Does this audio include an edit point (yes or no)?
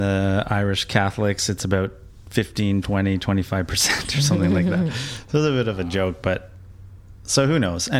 no